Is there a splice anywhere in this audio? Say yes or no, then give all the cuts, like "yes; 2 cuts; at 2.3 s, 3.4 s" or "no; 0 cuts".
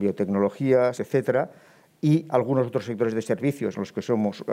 yes; 1 cut; at 0.9 s